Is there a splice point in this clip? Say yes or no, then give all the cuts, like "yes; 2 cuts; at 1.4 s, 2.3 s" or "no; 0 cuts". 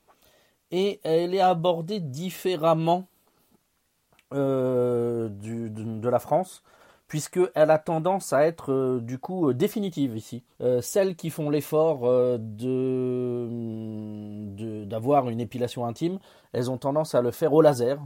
yes; 1 cut; at 10.5 s